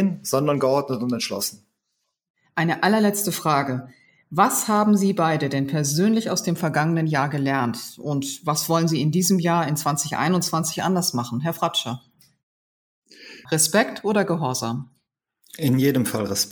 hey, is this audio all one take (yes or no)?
no